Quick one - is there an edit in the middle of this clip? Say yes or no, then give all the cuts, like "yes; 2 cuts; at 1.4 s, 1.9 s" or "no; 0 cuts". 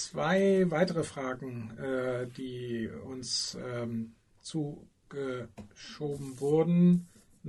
no; 0 cuts